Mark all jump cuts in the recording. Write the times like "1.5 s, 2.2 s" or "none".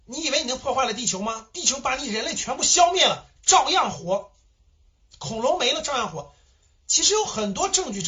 none